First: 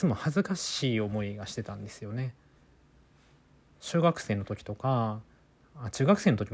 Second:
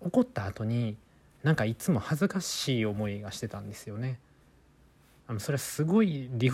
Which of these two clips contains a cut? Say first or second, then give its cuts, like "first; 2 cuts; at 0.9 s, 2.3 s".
second; 1 cut; at 5.2 s